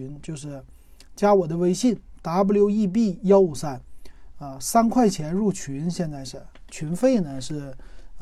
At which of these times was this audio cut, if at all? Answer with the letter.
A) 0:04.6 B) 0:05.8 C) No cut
C